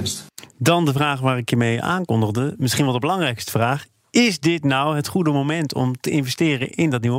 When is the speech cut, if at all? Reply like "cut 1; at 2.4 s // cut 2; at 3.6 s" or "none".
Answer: none